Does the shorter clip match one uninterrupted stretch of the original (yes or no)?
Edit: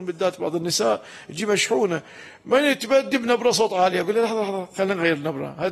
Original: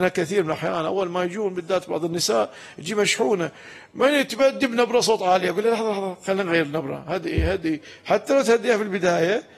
yes